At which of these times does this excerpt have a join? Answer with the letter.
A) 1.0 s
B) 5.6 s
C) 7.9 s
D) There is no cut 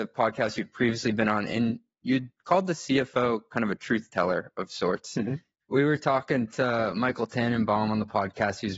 B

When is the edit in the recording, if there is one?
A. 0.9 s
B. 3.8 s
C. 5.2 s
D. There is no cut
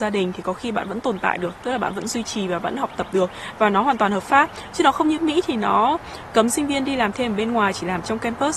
C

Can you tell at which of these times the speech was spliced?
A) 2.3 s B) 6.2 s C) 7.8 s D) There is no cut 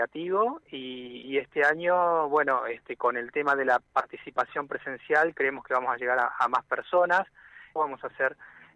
C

